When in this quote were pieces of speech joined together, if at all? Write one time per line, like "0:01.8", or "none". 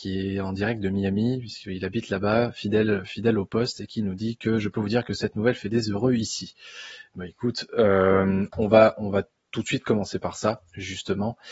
none